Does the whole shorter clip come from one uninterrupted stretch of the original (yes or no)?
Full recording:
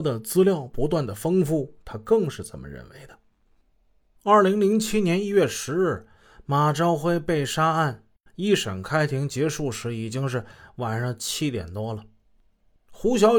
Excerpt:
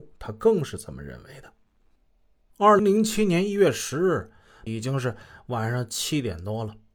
no